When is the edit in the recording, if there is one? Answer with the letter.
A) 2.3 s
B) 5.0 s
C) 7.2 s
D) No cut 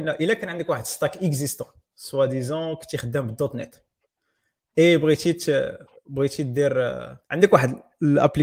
C